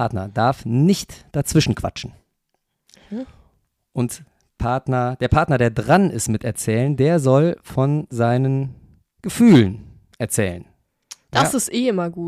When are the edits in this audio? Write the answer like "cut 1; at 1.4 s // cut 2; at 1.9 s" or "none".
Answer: none